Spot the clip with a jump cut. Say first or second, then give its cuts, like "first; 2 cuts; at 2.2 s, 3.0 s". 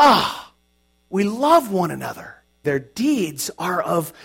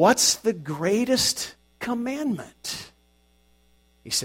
first; 1 cut; at 2.6 s